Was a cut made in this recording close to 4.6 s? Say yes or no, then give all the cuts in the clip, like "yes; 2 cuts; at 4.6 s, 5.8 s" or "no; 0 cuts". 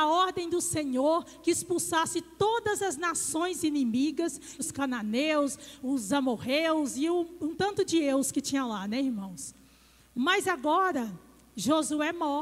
yes; 2 cuts; at 4.6 s, 10.0 s